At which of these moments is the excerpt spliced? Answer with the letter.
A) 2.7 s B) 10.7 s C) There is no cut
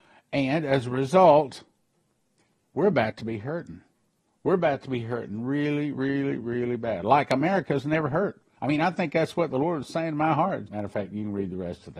B